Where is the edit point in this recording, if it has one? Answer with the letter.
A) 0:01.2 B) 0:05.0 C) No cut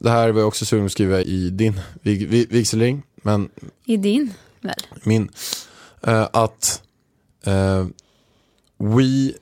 A